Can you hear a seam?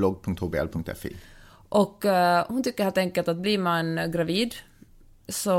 no; 0 cuts

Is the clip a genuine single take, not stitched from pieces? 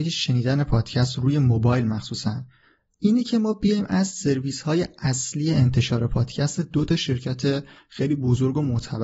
yes; 0 cuts

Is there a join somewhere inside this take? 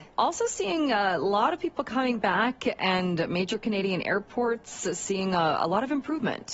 no; 0 cuts

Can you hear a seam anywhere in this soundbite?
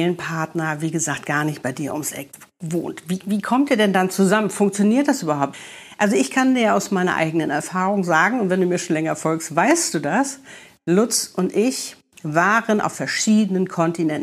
no; 0 cuts

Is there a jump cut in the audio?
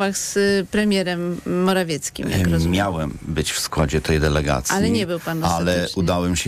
no; 0 cuts

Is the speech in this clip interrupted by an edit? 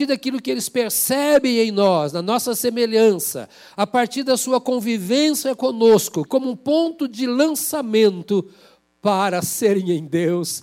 yes; 1 cut; at 6.3 s

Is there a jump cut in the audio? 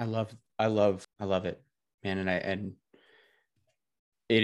yes; 1 cut; at 1.0 s

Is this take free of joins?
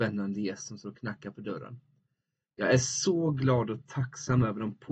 yes; 0 cuts

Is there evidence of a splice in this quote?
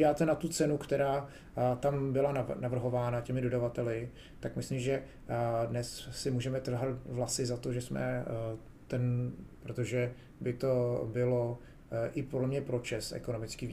yes; 1 cut; at 9.6 s

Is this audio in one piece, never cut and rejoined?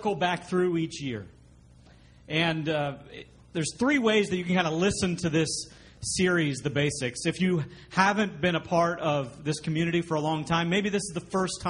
yes; 0 cuts

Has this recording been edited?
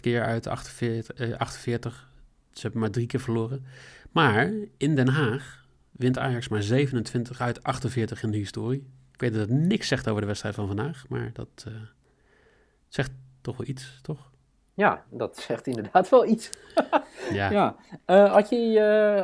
no; 0 cuts

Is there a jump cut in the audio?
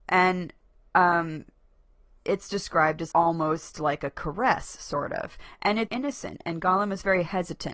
yes; 2 cuts; at 3.1 s, 5.9 s

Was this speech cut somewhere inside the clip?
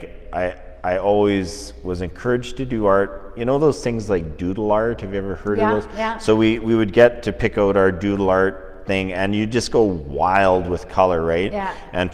no; 0 cuts

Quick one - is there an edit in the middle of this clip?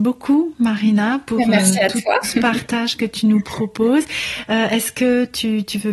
yes; 1 cut; at 2.2 s

